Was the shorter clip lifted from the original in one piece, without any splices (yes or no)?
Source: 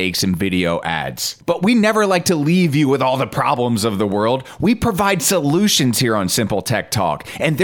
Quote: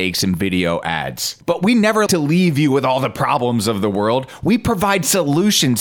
no